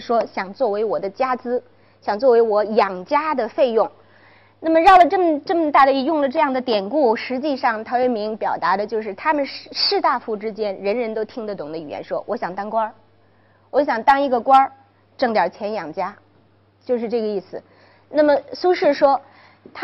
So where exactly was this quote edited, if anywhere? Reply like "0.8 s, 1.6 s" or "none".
none